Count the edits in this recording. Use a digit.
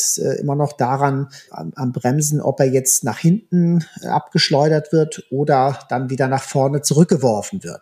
1